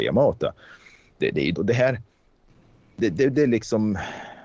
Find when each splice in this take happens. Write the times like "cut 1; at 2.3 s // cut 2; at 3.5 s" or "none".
cut 1; at 1.5 s